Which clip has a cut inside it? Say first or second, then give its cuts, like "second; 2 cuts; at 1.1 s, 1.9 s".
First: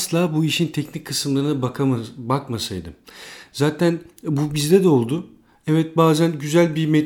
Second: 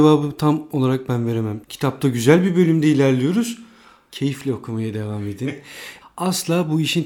second; 3 cuts; at 1.6 s, 4.1 s, 6.0 s